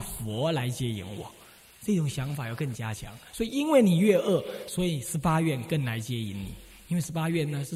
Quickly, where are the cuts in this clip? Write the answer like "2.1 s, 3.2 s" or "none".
none